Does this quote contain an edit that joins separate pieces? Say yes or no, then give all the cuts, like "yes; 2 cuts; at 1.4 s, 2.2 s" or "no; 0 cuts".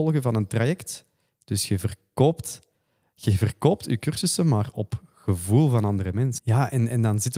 yes; 1 cut; at 6.4 s